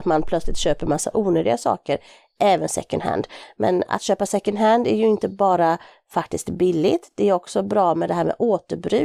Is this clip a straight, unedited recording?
yes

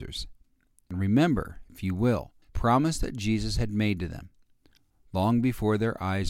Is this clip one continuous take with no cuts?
no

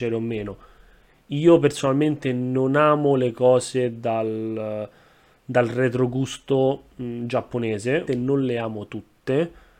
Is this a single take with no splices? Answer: no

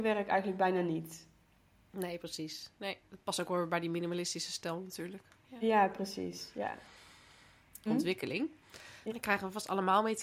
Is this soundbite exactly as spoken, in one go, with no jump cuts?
no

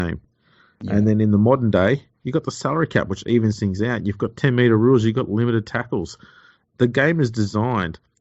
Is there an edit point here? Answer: no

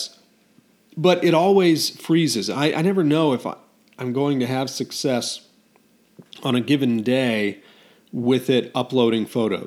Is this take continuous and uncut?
yes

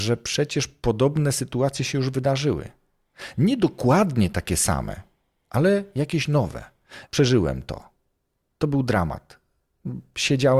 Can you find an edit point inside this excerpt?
yes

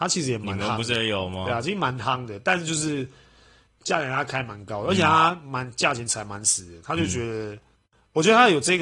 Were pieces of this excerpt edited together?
no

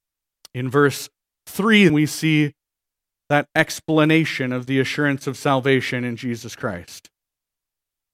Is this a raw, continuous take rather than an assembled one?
no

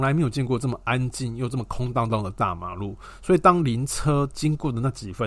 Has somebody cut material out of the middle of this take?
no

